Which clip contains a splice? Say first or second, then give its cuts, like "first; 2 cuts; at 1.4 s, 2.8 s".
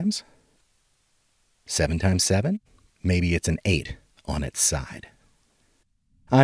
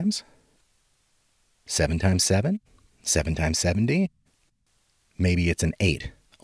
first; 1 cut; at 2.9 s